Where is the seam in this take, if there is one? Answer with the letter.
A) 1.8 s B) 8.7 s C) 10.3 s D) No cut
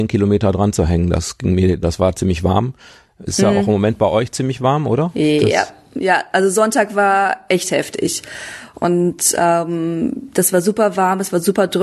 A